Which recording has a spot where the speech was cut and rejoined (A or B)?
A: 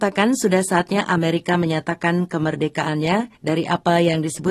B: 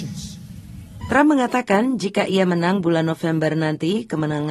B